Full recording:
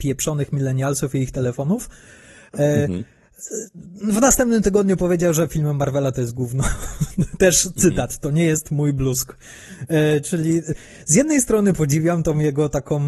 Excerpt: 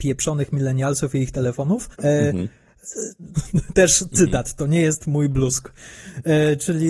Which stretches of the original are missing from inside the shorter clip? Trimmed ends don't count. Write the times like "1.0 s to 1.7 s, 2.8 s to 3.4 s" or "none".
1.9 s to 2.5 s, 3.9 s to 7.0 s